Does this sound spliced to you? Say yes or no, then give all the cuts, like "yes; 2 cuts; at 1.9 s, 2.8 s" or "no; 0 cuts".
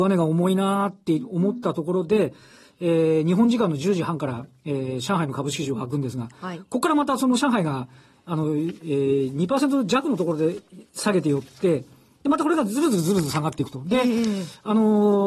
no; 0 cuts